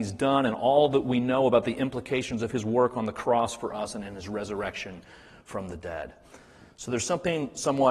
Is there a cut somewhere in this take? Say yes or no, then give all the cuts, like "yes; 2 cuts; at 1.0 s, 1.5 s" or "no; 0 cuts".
no; 0 cuts